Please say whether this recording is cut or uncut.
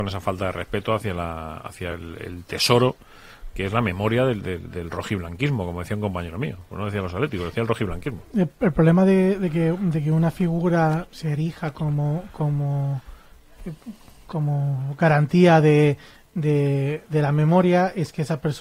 uncut